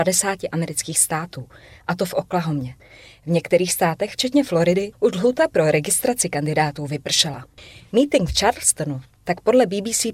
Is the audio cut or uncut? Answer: cut